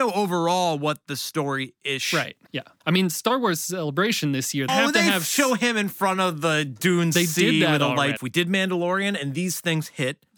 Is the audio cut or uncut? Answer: cut